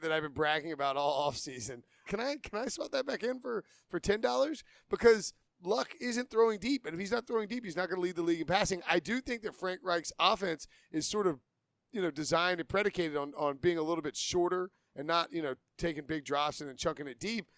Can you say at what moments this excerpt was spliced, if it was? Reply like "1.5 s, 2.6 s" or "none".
2.1 s